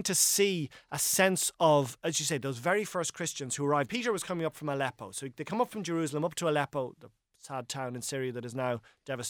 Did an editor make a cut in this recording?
yes; 1 cut; at 3.9 s

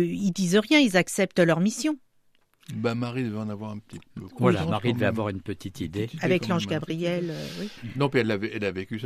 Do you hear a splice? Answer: no; 0 cuts

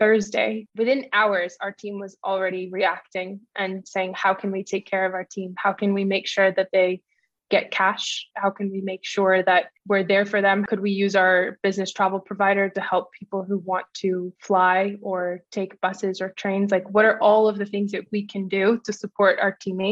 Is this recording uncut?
no; 2 cuts; at 8.3 s, 14.4 s

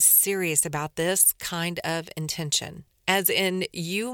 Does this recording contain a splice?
no; 0 cuts

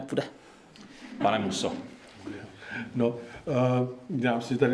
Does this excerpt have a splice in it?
no; 0 cuts

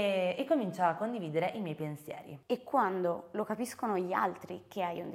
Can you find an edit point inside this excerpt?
no; 0 cuts

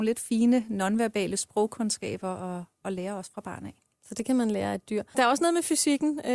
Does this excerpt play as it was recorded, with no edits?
no; 1 cut; at 5.1 s

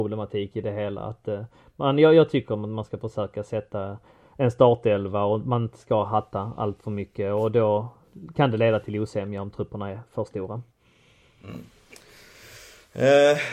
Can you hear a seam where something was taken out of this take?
no; 0 cuts

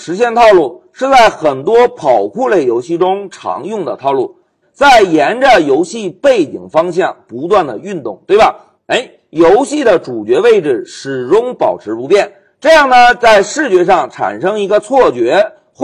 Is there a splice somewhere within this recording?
yes; 2 cuts; at 4.6 s, 8.8 s

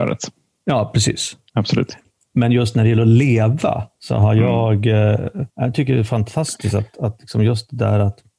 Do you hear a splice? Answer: yes; 1 cut; at 5.5 s

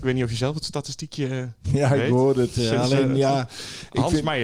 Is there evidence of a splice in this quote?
no; 0 cuts

